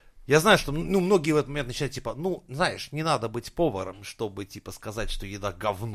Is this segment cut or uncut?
uncut